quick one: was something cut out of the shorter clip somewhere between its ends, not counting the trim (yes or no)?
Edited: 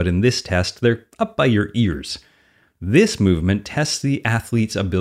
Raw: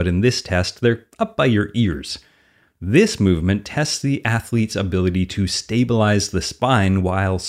no